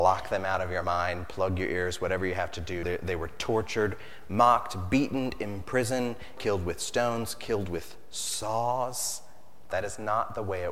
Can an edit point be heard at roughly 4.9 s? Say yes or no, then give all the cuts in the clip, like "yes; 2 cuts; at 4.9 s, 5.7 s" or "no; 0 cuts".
no; 3 cuts; at 2.8 s, 6.4 s, 9.7 s